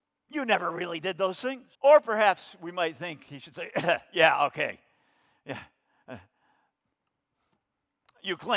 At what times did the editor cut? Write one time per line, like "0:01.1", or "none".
0:01.7